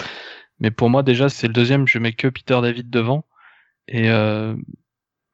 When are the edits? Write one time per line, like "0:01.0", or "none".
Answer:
0:01.3

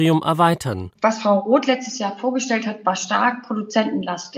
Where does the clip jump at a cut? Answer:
0:00.9

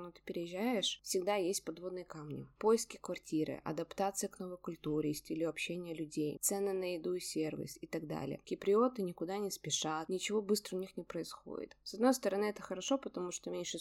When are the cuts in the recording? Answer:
0:06.4
0:08.4

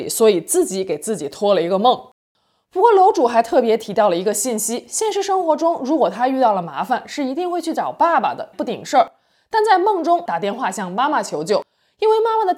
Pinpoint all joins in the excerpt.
0:08.5
0:10.3

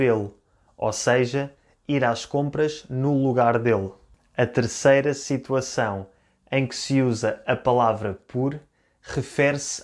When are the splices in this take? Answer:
none

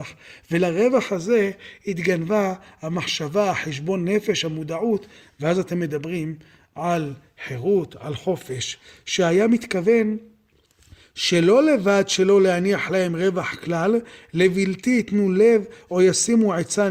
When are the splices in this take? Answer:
none

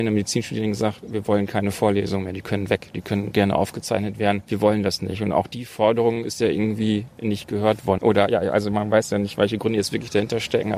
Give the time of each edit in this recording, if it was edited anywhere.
0:08.0

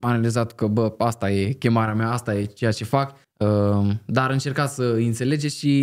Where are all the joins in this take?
0:03.2

